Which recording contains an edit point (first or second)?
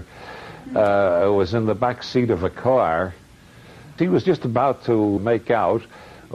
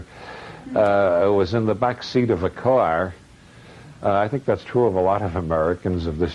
first